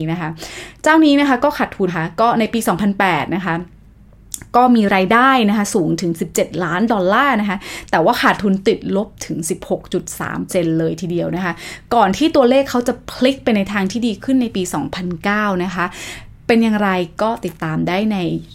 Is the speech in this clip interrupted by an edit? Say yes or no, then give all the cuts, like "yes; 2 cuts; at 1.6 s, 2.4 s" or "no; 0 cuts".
yes; 2 cuts; at 1.9 s, 10.5 s